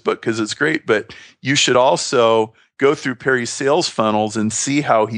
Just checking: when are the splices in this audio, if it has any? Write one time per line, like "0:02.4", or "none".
none